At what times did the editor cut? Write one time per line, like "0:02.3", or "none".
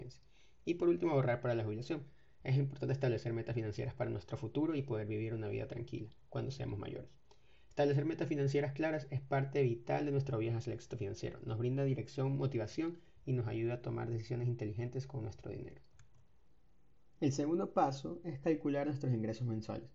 none